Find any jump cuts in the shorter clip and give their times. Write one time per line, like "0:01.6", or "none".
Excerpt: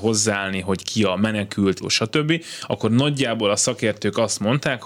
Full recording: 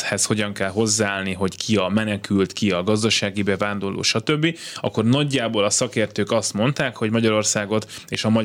0:01.8